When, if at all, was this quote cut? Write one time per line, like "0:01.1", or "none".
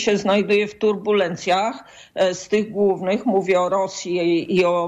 none